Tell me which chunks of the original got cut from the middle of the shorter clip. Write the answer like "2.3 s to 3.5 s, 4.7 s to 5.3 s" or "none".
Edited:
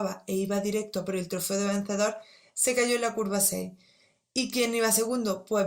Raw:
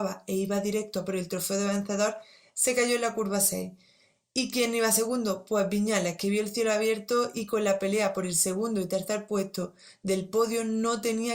none